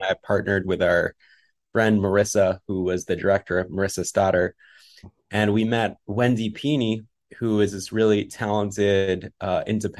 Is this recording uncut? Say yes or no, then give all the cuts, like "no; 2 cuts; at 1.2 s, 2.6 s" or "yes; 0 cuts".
yes; 0 cuts